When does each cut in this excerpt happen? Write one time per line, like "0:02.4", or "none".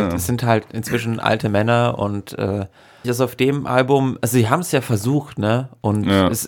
0:03.0